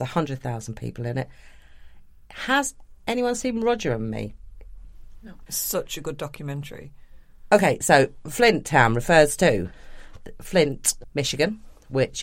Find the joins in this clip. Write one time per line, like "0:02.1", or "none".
0:05.5